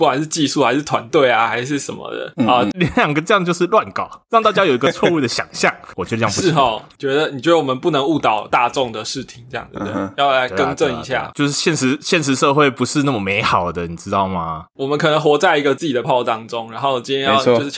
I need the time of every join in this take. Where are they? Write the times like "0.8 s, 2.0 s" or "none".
2.7 s, 16.0 s